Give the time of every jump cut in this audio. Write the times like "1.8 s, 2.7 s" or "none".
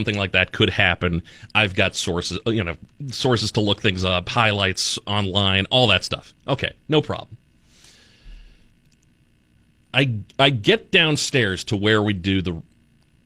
none

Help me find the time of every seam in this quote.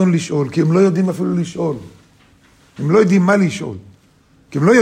none

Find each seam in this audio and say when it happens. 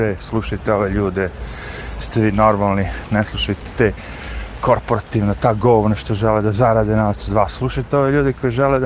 none

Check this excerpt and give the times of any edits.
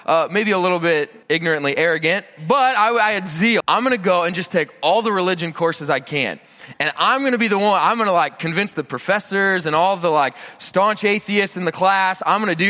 1.2 s, 3.6 s

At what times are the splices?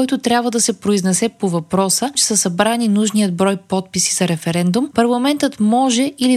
2.1 s

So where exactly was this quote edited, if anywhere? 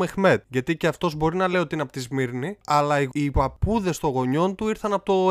none

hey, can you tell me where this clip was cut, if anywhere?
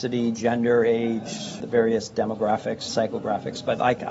2.9 s

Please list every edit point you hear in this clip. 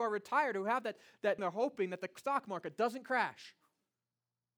1.4 s

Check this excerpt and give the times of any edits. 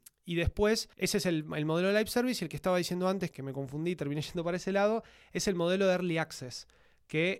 0.9 s, 3.3 s

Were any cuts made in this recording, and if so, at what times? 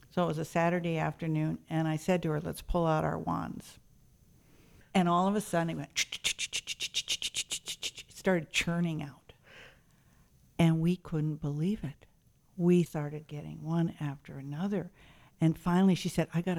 12.9 s

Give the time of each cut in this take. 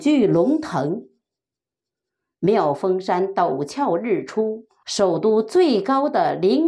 4.8 s

